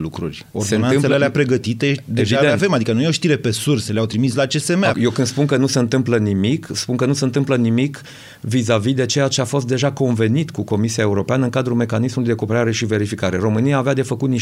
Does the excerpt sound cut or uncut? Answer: cut